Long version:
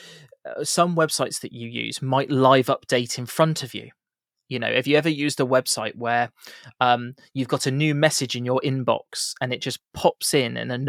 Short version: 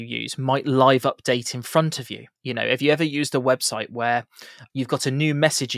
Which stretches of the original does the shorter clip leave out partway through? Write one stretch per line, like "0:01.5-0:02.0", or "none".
0:04.0-0:04.4
0:06.7-0:07.3